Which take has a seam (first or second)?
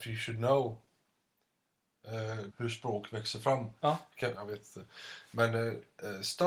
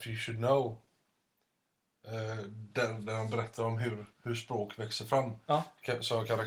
first